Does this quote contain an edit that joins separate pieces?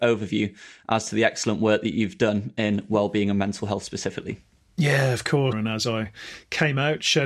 yes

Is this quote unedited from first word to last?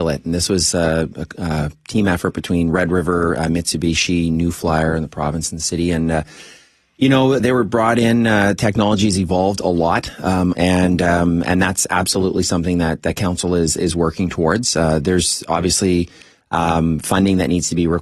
no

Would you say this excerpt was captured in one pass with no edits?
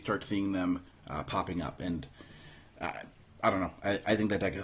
yes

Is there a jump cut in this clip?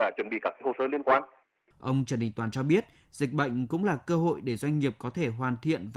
yes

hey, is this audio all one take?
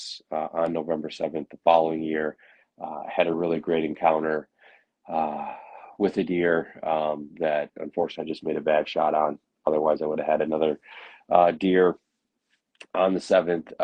yes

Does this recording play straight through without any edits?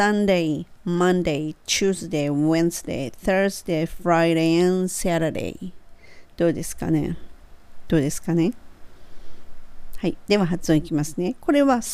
yes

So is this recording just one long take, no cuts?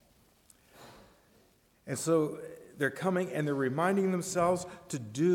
yes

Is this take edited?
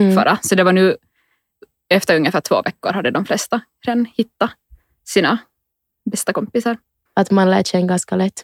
yes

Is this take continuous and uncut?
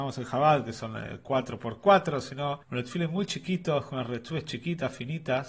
no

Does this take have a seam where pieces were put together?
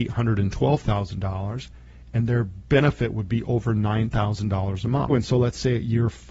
yes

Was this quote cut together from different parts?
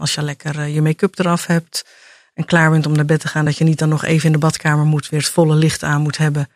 no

